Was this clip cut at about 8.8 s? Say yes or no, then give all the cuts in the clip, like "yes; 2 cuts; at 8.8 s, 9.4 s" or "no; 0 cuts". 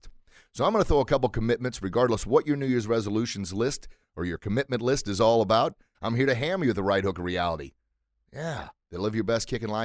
yes; 2 cuts; at 5.9 s, 8.8 s